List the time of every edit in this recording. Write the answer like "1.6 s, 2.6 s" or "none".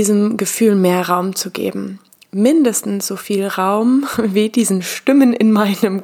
none